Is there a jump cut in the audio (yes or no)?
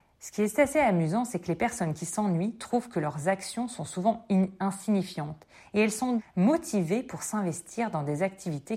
yes